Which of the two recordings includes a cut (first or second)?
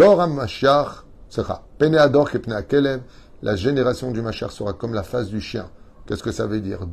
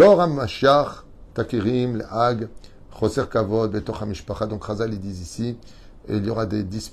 second